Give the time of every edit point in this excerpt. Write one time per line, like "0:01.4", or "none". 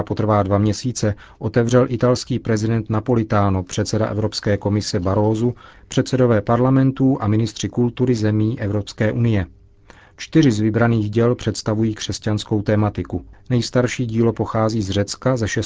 none